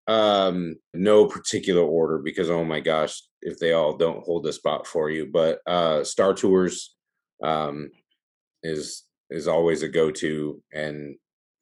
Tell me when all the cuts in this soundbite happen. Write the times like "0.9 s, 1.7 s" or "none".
0.9 s